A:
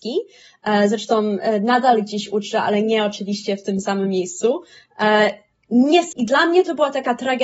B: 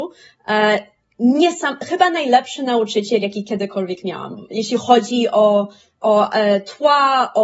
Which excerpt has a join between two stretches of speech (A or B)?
A